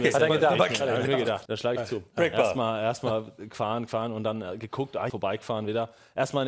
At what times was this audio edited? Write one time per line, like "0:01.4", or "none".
0:01.5
0:05.1